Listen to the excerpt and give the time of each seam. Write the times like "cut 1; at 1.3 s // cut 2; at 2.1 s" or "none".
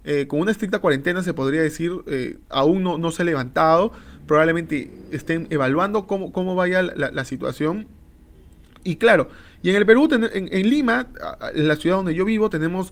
none